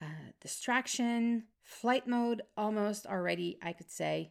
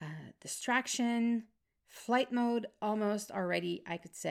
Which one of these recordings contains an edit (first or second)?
first